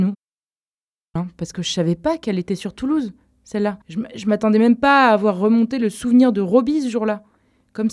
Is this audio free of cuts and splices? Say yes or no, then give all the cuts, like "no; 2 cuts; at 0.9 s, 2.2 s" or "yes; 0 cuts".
no; 2 cuts; at 1.2 s, 3.8 s